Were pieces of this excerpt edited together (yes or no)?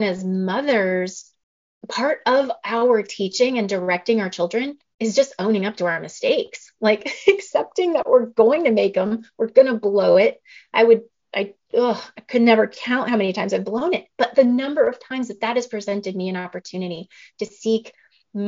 no